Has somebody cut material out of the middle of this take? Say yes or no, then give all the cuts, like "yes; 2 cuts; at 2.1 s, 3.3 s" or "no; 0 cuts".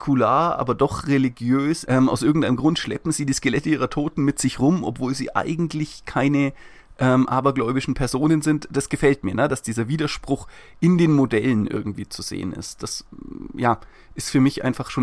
yes; 1 cut; at 1.9 s